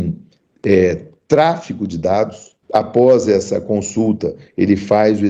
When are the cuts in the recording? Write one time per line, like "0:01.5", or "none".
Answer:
0:02.6